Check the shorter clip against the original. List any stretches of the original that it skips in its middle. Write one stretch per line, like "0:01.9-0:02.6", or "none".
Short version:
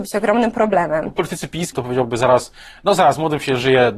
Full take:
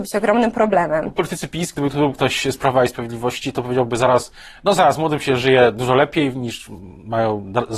0:01.7-0:03.5